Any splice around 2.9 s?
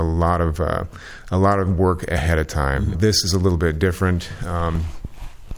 yes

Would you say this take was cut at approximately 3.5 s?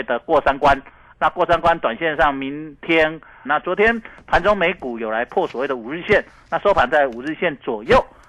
yes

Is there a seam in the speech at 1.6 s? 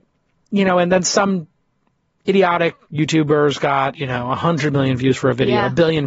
no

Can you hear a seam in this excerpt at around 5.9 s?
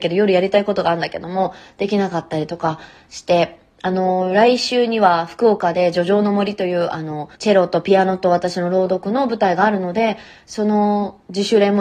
no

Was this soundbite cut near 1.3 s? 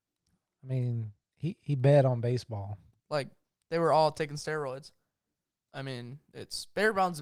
no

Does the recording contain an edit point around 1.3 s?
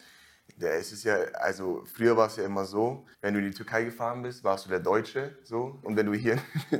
no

